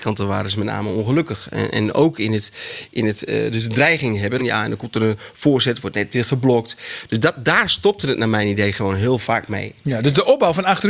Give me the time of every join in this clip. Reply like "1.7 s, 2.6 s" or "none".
4.4 s